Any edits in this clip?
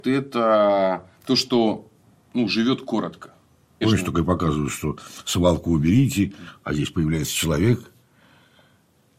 yes; 2 cuts; at 1.1 s, 3.8 s

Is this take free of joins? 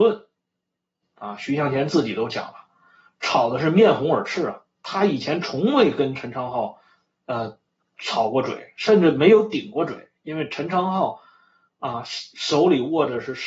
no; 1 cut; at 1.0 s

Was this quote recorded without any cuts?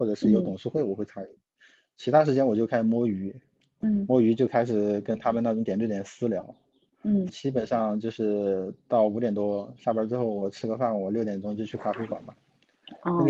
no; 2 cuts; at 7.3 s, 9.8 s

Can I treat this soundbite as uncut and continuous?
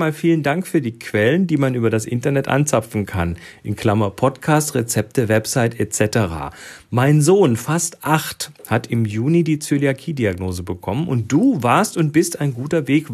yes; 0 cuts

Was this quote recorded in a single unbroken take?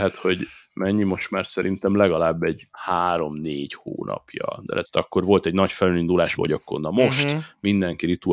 no; 3 cuts; at 2.7 s, 4.8 s, 6.4 s

